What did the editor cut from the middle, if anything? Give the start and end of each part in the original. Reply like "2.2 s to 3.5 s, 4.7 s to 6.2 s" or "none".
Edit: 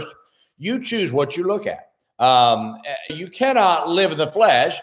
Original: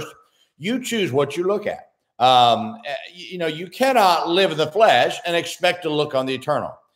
3.1 s to 3.5 s